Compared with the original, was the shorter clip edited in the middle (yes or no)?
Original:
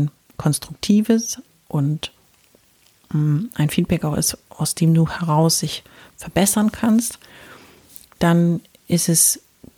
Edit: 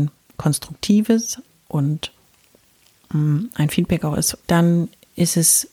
yes